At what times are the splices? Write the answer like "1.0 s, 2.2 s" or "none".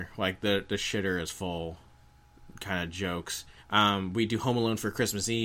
3.6 s